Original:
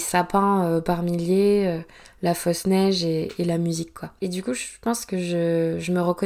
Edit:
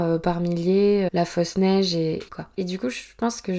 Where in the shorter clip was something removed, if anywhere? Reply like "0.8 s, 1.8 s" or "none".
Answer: 1.1 s, 2.3 s